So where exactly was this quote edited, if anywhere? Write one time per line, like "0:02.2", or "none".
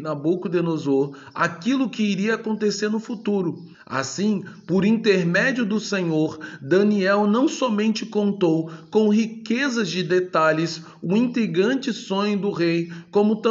0:03.7

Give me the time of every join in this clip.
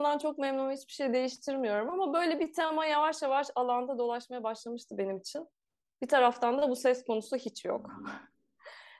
none

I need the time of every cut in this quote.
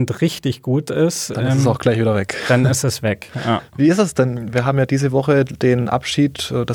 none

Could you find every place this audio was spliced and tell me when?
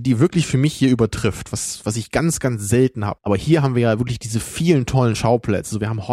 0:03.2

